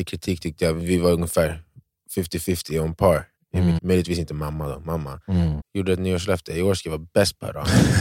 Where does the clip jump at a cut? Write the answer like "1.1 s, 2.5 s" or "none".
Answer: 3.8 s, 5.6 s